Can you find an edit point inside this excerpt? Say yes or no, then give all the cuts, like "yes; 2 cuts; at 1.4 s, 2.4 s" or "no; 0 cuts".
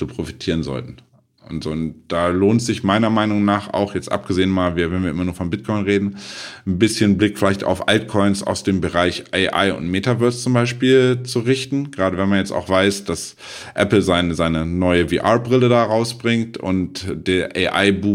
no; 0 cuts